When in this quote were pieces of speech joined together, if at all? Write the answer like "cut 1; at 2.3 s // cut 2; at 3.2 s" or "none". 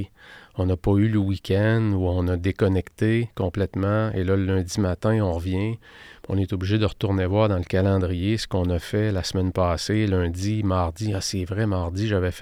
none

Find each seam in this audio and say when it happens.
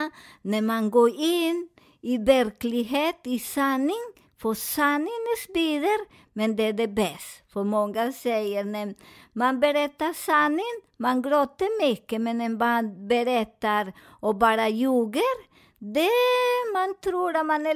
none

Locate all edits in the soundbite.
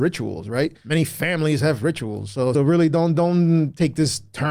cut 1; at 2.5 s

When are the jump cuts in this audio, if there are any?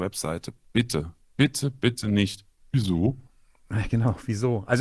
none

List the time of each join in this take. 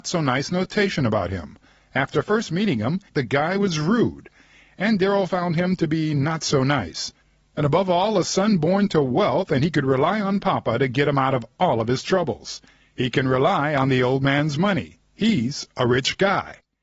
cut 1; at 3.1 s

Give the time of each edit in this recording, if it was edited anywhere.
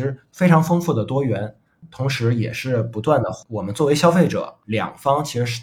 cut 1; at 4.6 s

